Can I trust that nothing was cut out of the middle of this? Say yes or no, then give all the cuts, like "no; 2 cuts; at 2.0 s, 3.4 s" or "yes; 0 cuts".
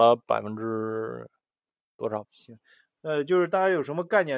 no; 1 cut; at 2.2 s